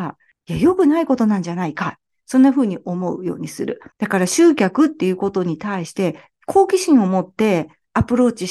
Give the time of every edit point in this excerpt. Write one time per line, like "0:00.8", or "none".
0:03.9

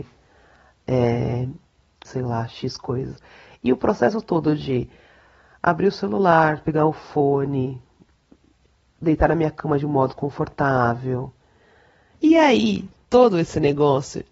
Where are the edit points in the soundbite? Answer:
0:02.1

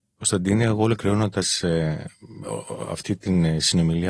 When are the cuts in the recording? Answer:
none

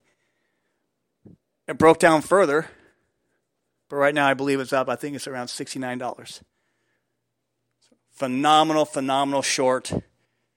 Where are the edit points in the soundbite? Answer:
none

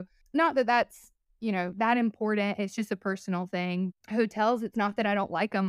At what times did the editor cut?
0:03.9

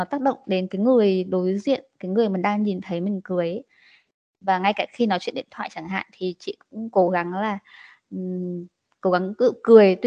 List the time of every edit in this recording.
none

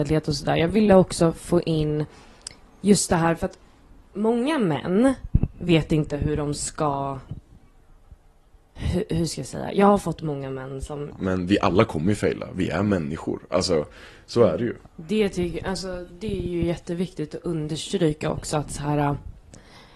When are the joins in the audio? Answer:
0:11.1
0:14.8

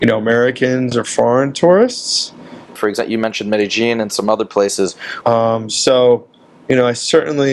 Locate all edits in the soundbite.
0:02.8
0:05.2

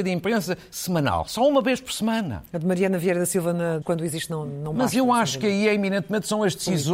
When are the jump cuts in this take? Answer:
0:03.8

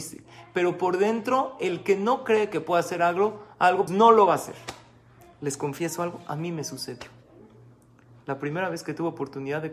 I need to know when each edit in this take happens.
0:03.9

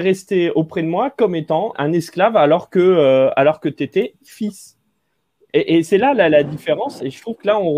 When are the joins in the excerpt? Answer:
0:01.7

